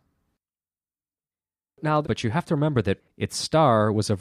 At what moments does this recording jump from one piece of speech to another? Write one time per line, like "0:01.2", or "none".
0:02.0